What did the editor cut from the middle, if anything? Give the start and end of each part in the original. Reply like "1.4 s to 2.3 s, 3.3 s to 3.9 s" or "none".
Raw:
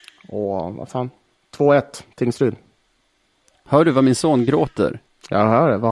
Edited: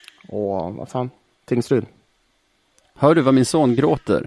1.4 s to 2.1 s